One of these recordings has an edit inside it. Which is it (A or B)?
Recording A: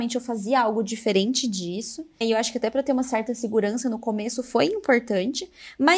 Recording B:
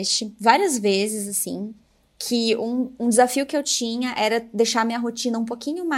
A